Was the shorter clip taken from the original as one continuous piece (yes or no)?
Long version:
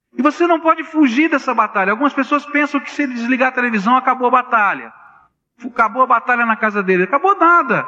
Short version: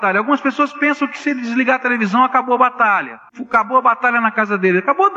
no